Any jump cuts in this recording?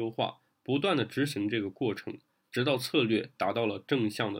no; 0 cuts

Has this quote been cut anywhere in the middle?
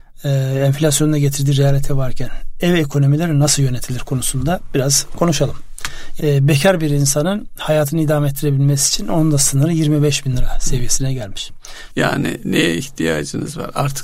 yes; 2 cuts; at 6.2 s, 11.9 s

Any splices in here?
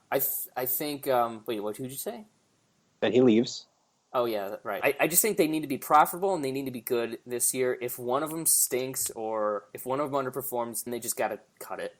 yes; 2 cuts; at 4.8 s, 10.9 s

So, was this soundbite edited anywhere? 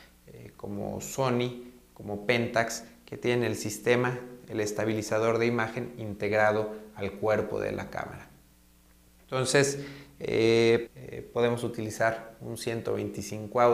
yes; 1 cut; at 10.9 s

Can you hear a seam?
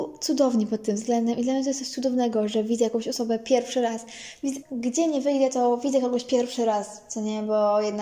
yes; 1 cut; at 4.6 s

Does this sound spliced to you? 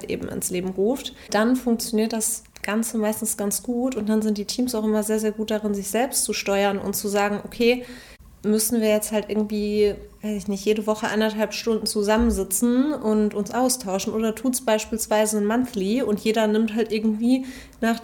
yes; 1 cut; at 1.3 s

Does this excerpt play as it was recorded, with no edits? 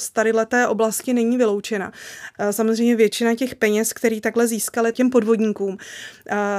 no; 2 cuts; at 2.3 s, 4.9 s

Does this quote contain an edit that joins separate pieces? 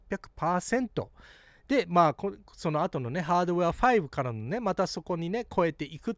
no; 0 cuts

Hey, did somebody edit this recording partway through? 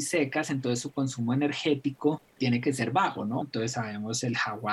yes; 1 cut; at 3.4 s

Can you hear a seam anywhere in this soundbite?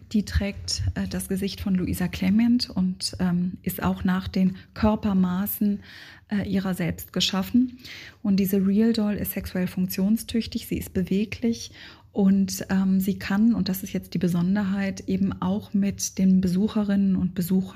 no; 0 cuts

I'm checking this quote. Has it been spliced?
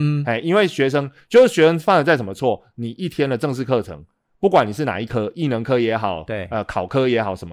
no; 0 cuts

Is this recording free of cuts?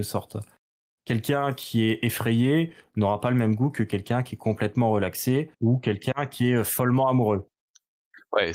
no; 1 cut; at 5.5 s

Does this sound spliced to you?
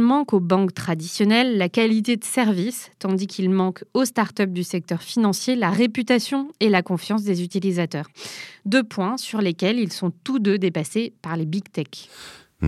no; 0 cuts

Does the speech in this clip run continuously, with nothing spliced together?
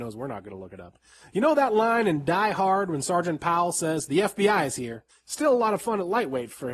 no; 1 cut; at 5.1 s

